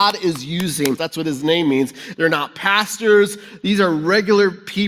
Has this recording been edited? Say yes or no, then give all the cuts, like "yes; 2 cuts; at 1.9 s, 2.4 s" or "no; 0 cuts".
yes; 2 cuts; at 1.0 s, 2.1 s